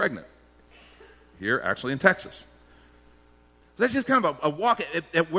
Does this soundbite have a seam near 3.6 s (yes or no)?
yes